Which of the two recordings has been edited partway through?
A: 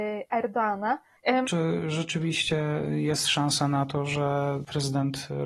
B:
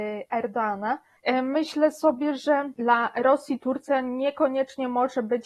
A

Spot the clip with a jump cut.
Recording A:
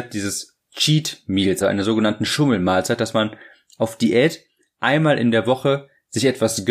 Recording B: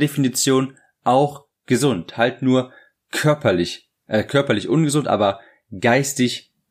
A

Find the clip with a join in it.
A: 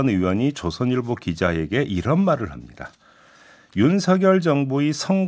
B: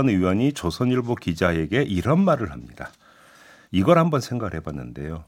B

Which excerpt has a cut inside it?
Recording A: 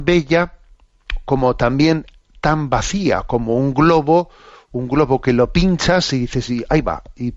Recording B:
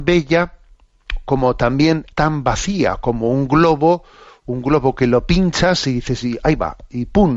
B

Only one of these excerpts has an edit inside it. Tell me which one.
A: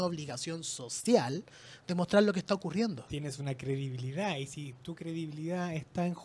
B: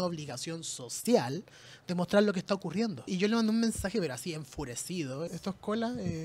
B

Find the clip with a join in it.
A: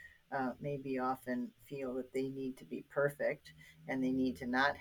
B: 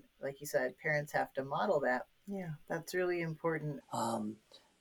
B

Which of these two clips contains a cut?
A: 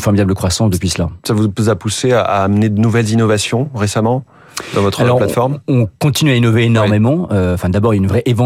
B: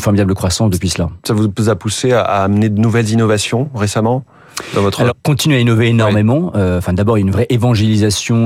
B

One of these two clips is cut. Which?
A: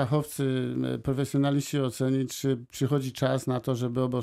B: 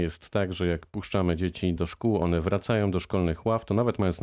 B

